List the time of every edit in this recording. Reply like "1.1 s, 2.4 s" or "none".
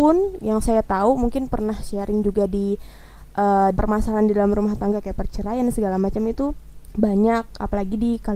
3.8 s, 6.8 s